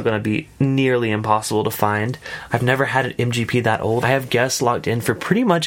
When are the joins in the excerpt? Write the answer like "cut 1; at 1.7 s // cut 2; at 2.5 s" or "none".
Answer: cut 1; at 2.5 s // cut 2; at 4.0 s